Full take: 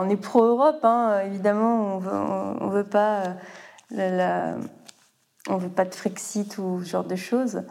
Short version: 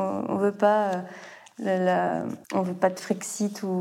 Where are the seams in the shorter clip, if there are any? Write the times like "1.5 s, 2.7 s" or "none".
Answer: 2.4 s